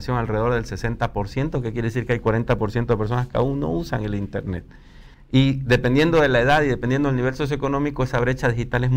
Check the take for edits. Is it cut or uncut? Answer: cut